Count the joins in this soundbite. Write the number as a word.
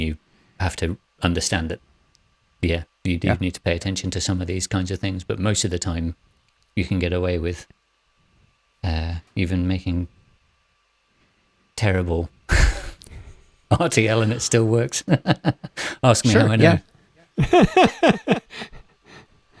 zero